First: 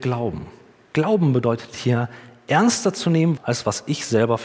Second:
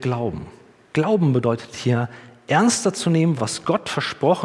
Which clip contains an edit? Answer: first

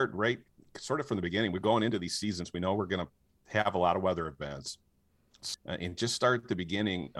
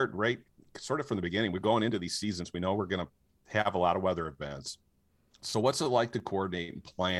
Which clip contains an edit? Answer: first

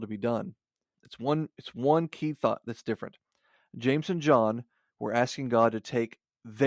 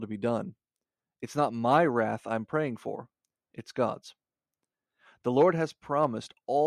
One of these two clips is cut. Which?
first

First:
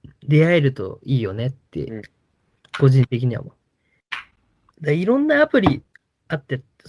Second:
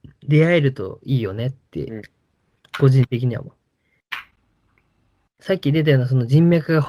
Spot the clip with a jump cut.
first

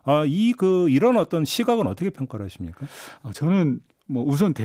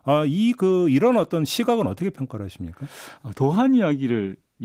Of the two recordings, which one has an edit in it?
second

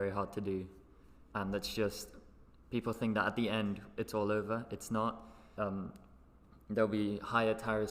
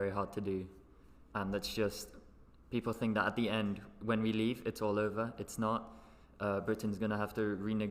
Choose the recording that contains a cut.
first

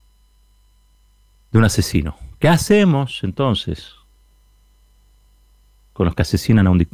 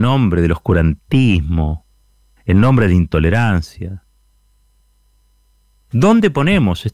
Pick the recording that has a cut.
second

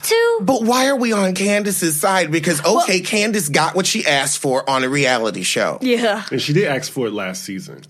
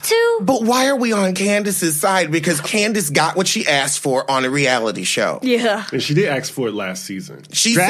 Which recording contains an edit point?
second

